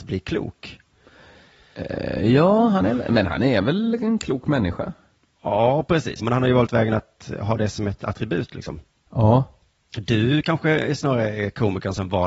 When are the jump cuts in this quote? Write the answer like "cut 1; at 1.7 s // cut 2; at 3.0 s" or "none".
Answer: cut 1; at 6.2 s